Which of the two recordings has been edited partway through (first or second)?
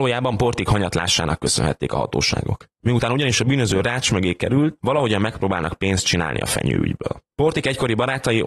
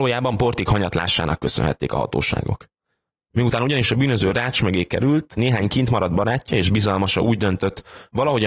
first